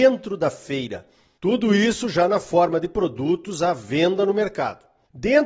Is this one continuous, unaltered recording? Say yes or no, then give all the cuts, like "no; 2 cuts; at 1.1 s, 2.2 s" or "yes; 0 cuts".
no; 1 cut; at 1.4 s